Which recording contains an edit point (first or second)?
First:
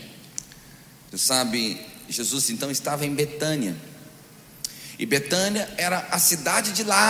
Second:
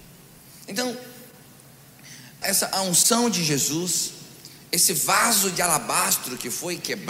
second